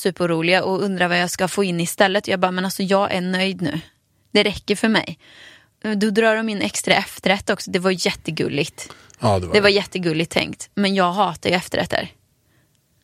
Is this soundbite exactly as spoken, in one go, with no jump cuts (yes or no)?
yes